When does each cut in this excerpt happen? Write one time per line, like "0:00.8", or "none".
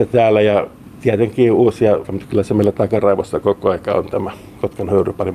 0:02.0